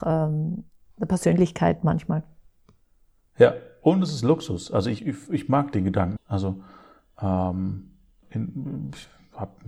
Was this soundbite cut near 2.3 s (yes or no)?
no